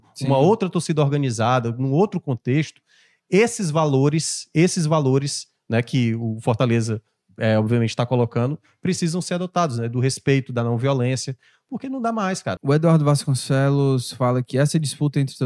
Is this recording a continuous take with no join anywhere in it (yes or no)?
no